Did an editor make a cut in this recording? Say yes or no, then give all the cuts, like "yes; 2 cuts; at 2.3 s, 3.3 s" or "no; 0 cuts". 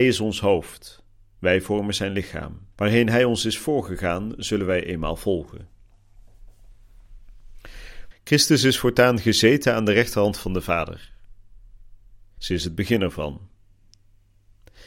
yes; 3 cuts; at 2.7 s, 8.1 s, 12.4 s